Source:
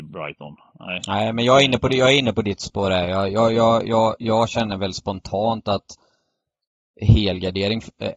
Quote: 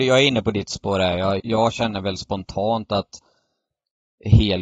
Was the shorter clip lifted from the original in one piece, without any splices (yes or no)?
no